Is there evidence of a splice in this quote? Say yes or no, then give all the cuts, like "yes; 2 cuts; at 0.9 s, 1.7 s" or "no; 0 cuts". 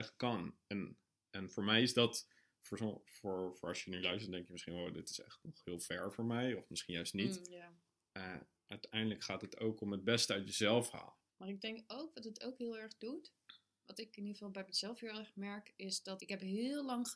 yes; 3 cuts; at 8.5 s, 11.3 s, 16.2 s